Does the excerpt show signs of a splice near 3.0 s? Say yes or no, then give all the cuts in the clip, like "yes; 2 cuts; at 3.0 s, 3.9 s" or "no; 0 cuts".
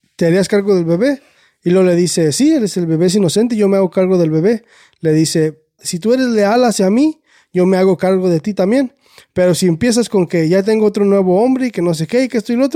no; 1 cut; at 5.8 s